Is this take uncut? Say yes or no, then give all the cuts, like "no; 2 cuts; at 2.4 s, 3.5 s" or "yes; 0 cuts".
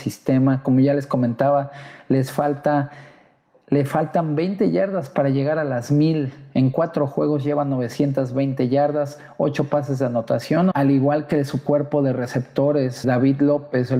no; 2 cuts; at 10.7 s, 13.0 s